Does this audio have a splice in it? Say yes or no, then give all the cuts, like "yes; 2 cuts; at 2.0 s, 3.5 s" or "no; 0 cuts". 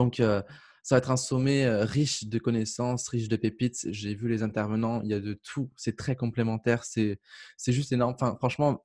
no; 0 cuts